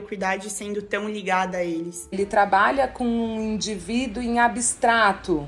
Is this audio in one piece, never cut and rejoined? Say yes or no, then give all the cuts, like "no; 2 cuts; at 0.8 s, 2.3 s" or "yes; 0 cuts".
no; 1 cut; at 2.1 s